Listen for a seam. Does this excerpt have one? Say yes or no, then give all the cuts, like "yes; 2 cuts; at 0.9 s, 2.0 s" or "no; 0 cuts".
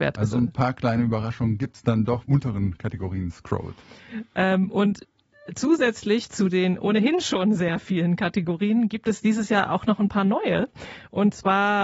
yes; 1 cut; at 2.2 s